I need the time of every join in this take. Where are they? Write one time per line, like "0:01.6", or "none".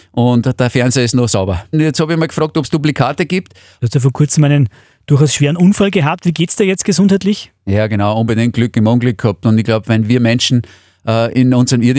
0:01.7
0:03.8